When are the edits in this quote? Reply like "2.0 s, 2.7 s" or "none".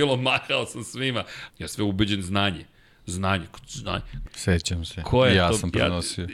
1.5 s, 4.3 s